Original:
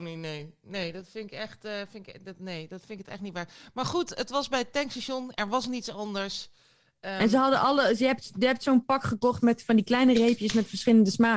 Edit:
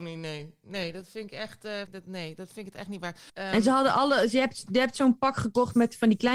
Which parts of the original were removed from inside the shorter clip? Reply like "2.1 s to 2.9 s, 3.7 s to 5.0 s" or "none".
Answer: 1.9 s to 2.2 s, 3.6 s to 7.0 s